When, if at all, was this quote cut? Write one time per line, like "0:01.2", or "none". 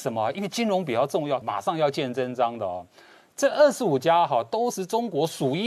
0:01.4